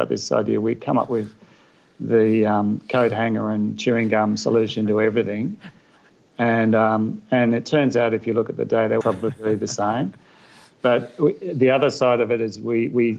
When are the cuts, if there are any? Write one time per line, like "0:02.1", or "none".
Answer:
0:09.0